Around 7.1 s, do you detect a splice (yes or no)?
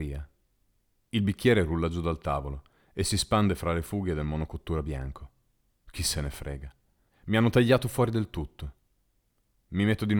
yes